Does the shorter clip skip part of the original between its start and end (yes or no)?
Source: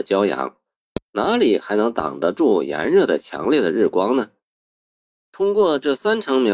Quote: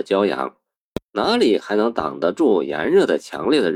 no